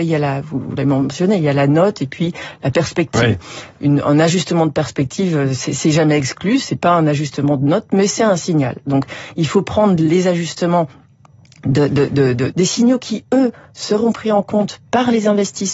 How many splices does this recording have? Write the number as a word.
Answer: one